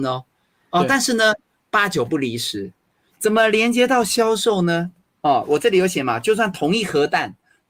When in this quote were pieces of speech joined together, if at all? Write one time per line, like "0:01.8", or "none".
none